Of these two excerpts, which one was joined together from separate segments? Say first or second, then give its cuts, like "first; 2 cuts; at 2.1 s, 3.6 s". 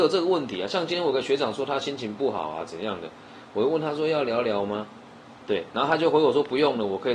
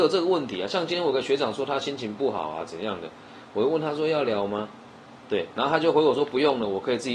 second; 1 cut; at 4.3 s